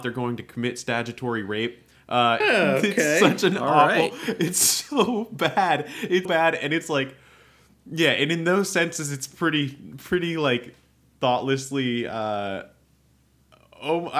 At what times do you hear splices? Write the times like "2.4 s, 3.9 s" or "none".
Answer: 2.4 s, 6.3 s